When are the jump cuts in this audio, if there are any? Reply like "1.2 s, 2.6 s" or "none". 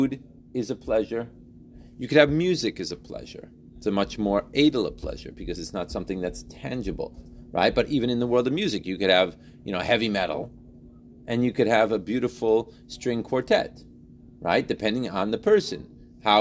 none